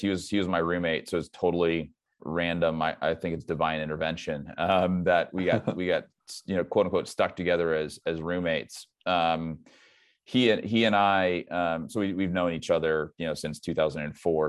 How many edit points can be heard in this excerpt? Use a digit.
1